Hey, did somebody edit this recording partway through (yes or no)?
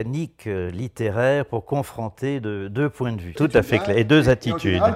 yes